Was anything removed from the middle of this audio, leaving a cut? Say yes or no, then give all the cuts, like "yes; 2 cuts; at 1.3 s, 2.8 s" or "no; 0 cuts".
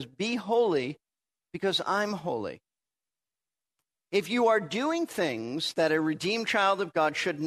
no; 0 cuts